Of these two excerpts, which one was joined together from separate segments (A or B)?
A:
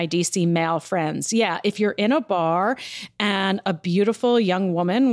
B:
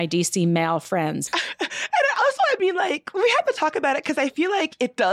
B